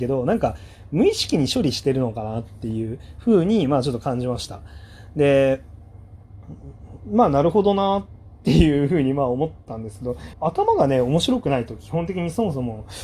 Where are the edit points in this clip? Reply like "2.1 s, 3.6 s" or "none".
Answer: 10.3 s